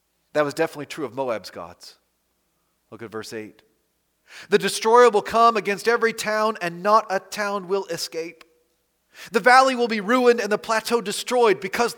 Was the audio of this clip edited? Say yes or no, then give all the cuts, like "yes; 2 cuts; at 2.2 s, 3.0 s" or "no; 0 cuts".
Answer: no; 0 cuts